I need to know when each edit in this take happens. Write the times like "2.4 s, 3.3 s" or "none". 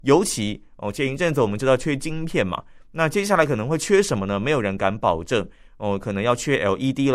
none

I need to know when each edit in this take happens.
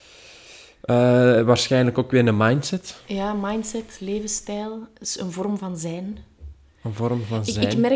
none

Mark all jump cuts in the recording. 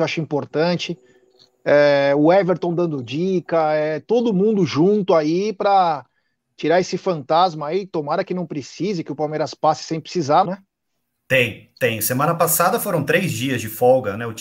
10.4 s

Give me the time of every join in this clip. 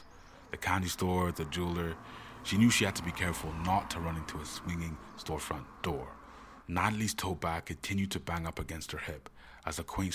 1.3 s, 6.6 s

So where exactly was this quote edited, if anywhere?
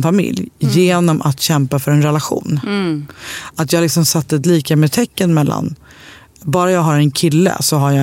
none

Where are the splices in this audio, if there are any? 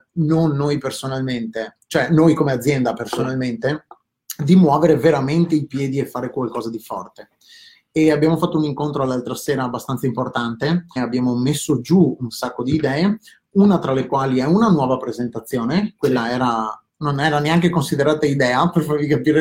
11.0 s, 16.9 s

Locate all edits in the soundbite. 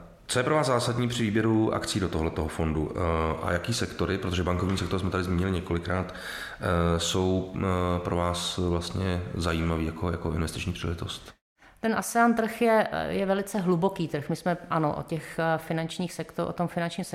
none

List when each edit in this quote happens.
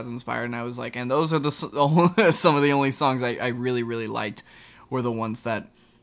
none

